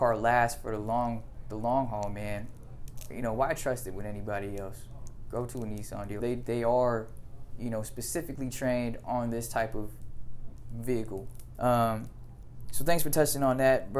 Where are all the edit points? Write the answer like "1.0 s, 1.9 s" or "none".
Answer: 6.2 s, 11.5 s

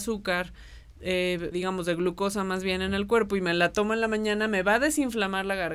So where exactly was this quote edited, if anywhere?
1.5 s

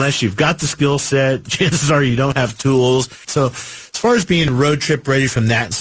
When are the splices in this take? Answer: 3.2 s

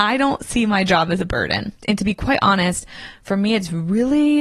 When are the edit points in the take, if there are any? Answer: none

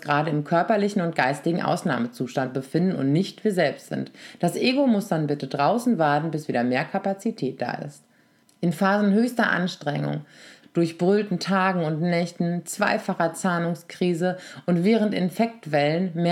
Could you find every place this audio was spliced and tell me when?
8.5 s, 10.6 s

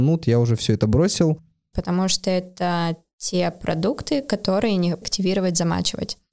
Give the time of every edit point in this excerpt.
1.7 s, 5.0 s

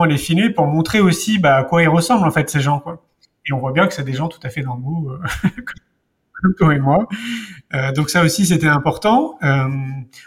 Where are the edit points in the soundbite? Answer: none

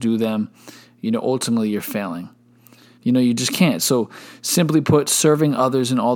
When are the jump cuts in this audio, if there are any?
3.0 s

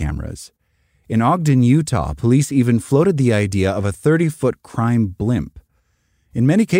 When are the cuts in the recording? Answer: none

